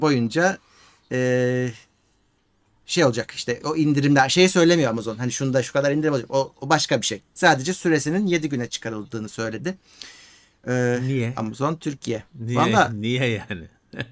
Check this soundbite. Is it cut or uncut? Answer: uncut